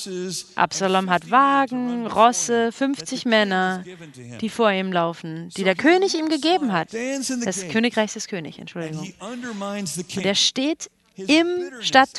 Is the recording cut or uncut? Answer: cut